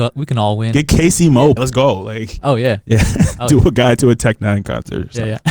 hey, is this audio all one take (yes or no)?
no